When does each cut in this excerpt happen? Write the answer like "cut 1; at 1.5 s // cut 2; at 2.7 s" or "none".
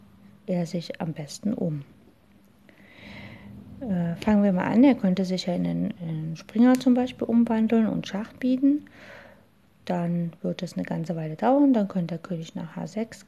none

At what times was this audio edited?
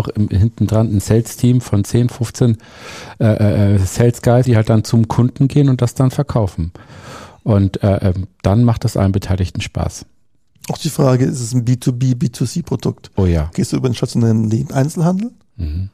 cut 1; at 4.5 s // cut 2; at 13.5 s

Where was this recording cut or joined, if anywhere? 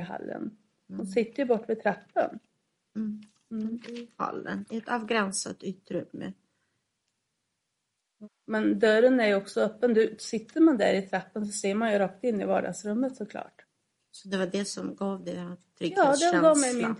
none

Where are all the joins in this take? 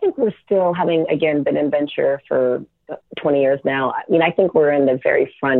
none

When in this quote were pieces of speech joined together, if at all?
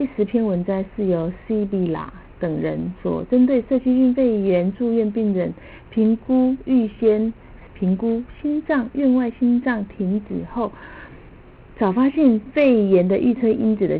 cut 1; at 7.7 s

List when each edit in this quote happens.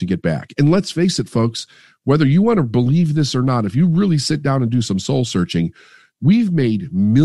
none

